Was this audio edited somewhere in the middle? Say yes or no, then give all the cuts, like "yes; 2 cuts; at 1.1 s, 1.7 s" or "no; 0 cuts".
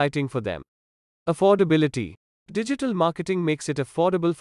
yes; 1 cut; at 1.1 s